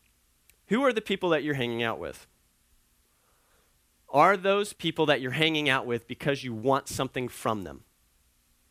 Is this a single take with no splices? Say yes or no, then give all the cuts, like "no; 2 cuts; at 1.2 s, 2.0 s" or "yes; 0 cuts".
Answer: no; 1 cut; at 4.7 s